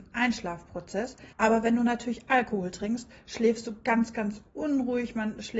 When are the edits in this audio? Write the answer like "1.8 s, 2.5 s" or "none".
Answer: 1.3 s